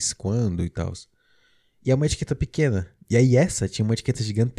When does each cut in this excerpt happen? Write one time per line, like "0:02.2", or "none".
none